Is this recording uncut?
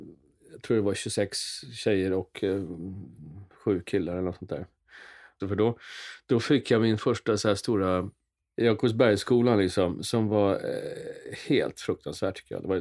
no; 2 cuts; at 5.4 s, 8.6 s

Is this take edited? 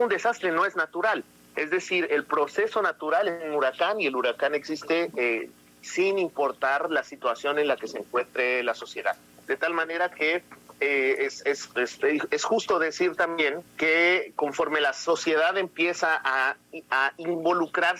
yes; 1 cut; at 13.7 s

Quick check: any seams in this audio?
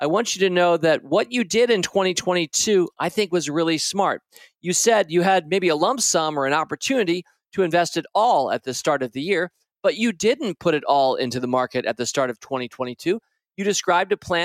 no; 0 cuts

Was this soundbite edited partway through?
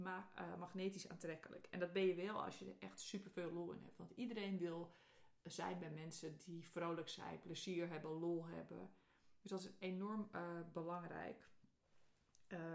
no; 0 cuts

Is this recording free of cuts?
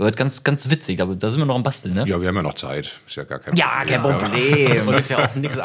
yes; 0 cuts

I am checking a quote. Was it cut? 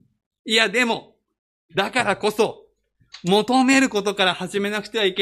no; 0 cuts

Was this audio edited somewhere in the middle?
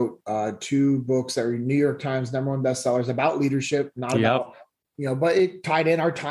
no; 0 cuts

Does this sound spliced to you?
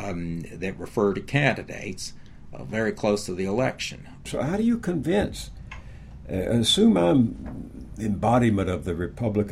yes; 1 cut; at 4.3 s

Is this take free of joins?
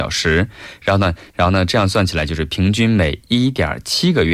no; 1 cut; at 1.3 s

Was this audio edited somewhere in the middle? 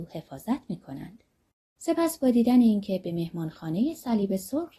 yes; 1 cut; at 1.8 s

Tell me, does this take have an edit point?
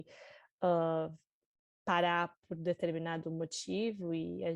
no; 0 cuts

